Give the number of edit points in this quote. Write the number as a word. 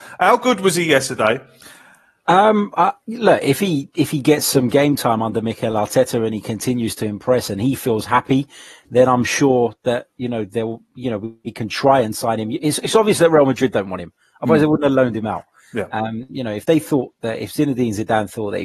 one